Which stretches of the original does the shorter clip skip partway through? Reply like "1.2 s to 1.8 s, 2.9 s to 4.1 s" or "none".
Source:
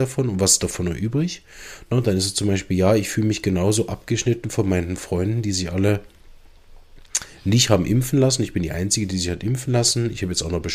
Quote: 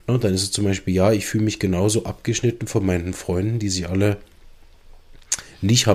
none